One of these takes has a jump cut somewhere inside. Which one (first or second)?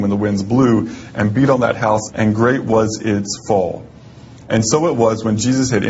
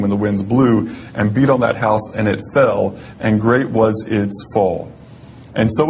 first